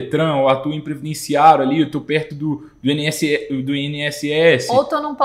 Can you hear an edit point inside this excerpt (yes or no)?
no